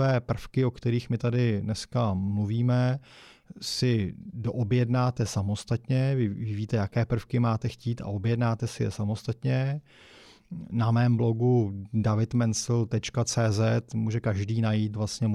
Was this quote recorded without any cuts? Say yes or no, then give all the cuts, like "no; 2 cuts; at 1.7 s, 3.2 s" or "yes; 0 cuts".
yes; 0 cuts